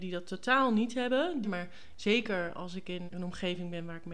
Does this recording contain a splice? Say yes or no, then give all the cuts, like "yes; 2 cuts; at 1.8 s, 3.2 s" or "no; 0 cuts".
yes; 2 cuts; at 1.4 s, 3.1 s